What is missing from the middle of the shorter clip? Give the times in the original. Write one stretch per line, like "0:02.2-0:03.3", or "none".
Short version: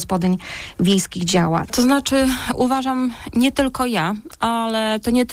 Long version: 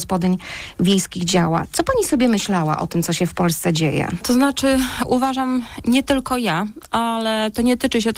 0:01.7-0:04.2